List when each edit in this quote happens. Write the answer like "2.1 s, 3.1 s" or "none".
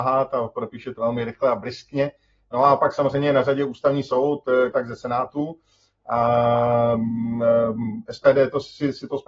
1.0 s, 4.7 s